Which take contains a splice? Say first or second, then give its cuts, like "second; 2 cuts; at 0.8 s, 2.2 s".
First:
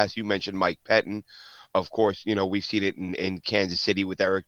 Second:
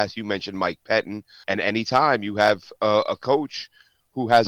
second; 1 cut; at 1.4 s